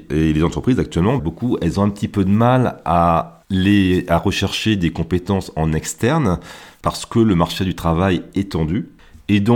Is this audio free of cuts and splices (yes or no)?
no